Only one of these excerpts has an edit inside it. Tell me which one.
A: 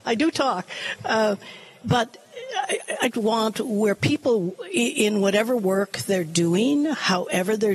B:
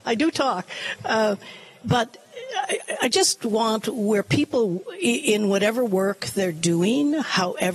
A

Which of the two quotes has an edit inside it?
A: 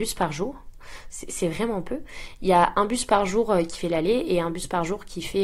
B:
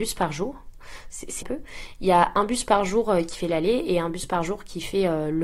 B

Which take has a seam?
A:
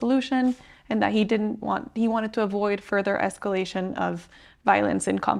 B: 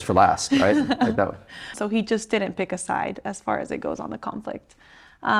B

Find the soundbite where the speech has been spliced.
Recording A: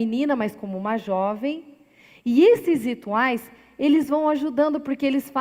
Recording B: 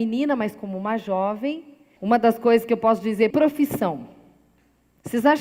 B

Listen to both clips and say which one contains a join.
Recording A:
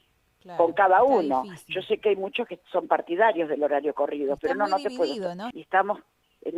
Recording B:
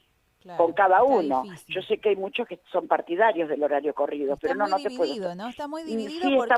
A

